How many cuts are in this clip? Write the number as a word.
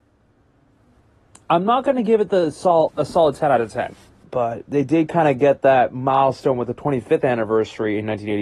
two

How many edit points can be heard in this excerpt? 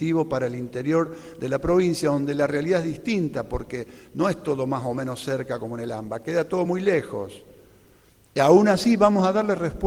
zero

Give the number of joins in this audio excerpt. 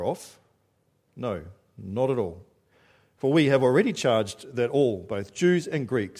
zero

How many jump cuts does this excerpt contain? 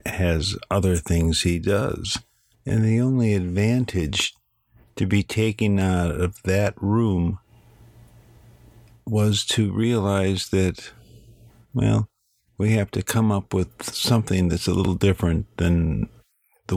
one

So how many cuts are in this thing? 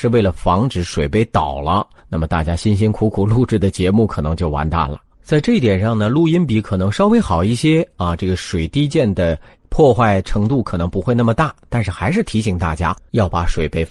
one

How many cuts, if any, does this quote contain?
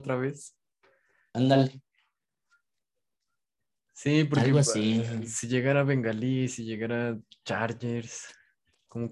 zero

